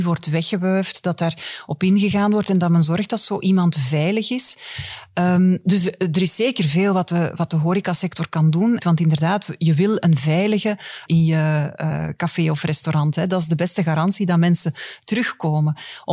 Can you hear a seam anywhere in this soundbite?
yes; 2 cuts; at 8.8 s, 11.1 s

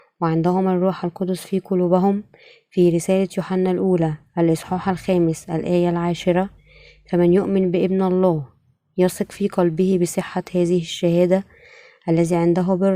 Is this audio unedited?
yes; 0 cuts

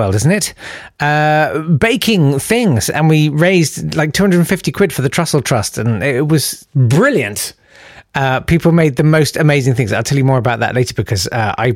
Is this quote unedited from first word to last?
yes; 0 cuts

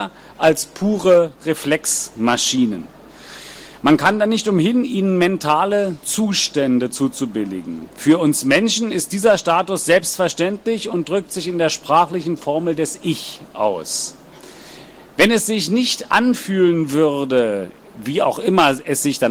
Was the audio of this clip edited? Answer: no; 0 cuts

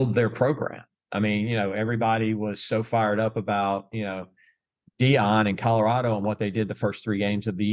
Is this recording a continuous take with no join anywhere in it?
yes; 0 cuts

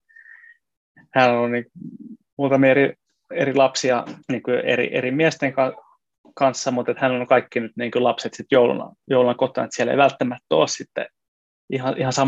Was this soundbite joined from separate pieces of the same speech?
yes; 1 cut; at 4.2 s

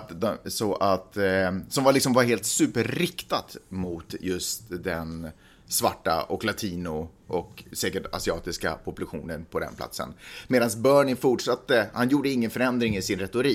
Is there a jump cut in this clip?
no; 0 cuts

